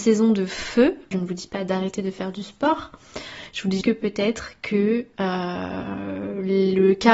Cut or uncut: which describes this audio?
cut